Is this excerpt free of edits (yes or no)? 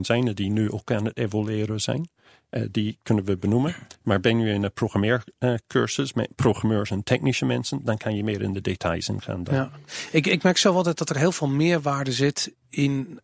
yes